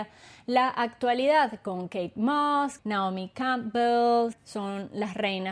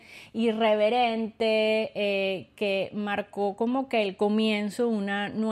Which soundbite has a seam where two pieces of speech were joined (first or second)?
first